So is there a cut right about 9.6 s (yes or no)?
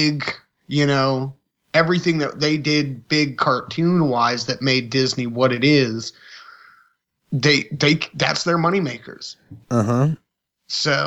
yes